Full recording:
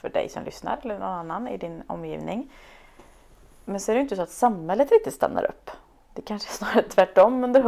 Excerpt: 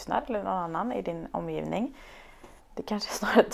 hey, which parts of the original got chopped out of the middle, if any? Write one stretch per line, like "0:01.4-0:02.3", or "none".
0:03.1-0:06.0